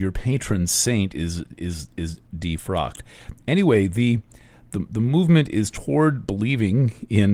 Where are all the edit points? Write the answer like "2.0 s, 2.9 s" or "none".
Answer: none